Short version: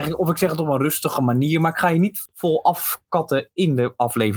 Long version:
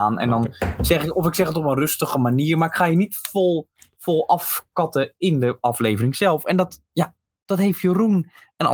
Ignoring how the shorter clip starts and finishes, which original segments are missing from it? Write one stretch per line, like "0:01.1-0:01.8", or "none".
0:03.2-0:03.9